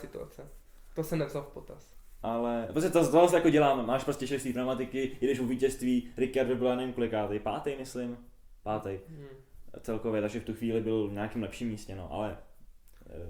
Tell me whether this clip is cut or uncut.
uncut